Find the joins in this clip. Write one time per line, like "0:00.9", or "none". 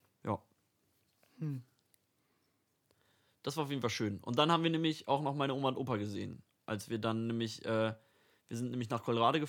none